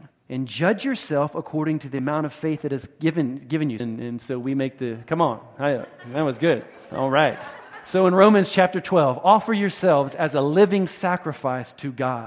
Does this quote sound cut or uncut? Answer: cut